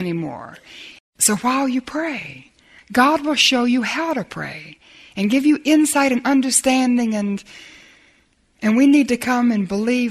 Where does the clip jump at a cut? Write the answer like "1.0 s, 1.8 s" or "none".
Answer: 1.0 s, 2.8 s